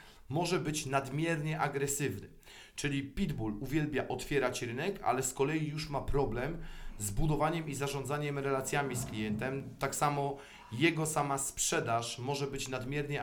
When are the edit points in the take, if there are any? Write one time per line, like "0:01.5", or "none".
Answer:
none